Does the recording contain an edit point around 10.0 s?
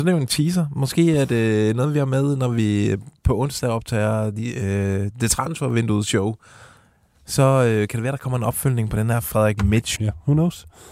yes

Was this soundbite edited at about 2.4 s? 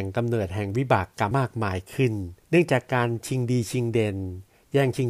yes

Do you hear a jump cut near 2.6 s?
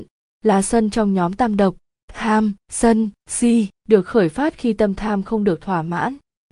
yes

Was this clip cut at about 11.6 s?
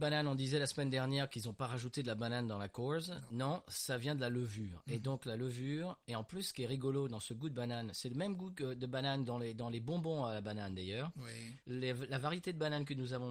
yes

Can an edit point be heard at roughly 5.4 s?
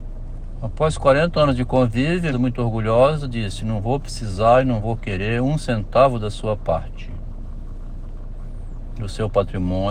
no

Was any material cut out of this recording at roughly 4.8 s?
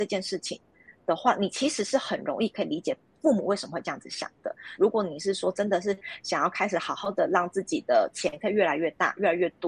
yes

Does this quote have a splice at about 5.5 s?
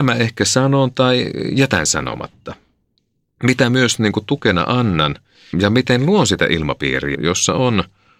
yes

